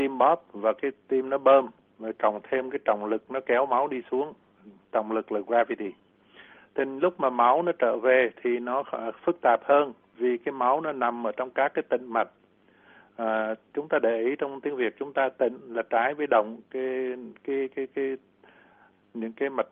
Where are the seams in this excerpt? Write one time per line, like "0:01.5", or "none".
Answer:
none